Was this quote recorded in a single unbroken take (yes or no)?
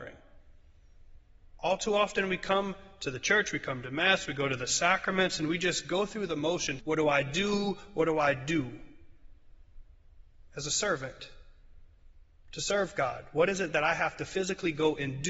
no